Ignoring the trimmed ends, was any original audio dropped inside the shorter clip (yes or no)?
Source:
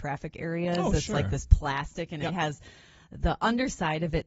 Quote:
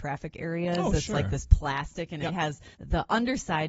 yes